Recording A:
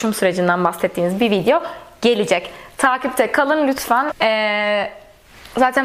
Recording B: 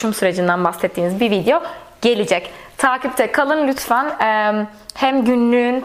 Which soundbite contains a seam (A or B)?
A